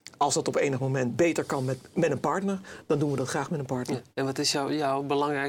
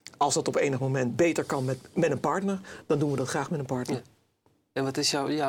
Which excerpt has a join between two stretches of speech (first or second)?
first